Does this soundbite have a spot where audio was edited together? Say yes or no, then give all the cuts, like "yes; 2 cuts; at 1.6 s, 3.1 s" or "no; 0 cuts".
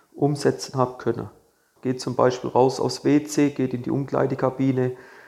yes; 1 cut; at 1.8 s